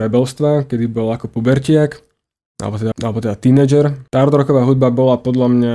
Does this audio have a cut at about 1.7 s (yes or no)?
no